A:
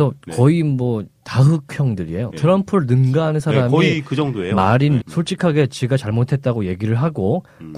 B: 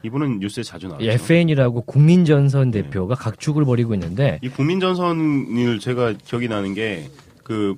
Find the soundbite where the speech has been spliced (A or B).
A